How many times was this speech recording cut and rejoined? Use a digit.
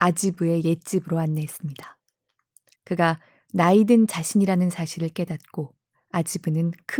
1